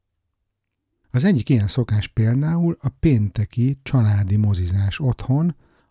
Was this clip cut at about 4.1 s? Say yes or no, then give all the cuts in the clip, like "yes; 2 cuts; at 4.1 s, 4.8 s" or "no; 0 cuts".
no; 1 cut; at 1.0 s